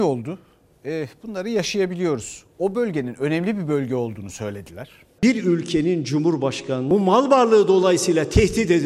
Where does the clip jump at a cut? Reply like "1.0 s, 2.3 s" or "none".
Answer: 5.2 s

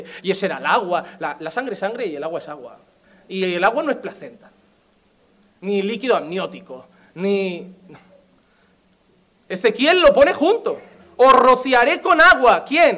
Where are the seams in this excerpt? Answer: none

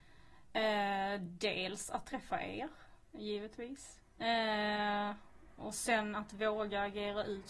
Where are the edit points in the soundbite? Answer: 3.0 s

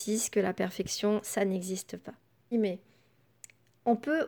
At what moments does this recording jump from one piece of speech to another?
2.5 s

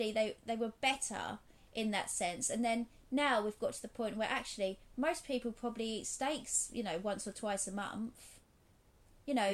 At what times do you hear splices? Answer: none

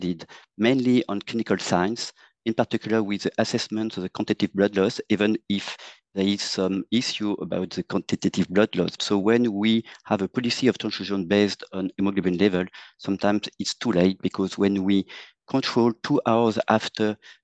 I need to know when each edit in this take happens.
9.0 s

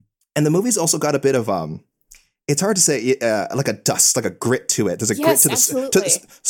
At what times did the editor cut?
none

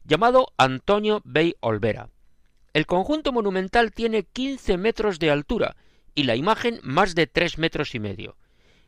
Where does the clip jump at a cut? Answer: none

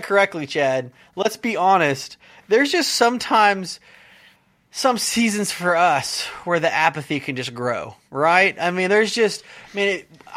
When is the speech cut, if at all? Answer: none

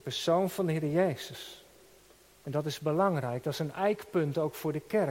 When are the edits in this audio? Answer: none

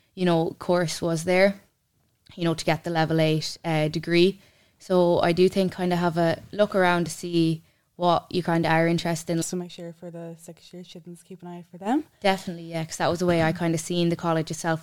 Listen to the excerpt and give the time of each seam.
9.4 s

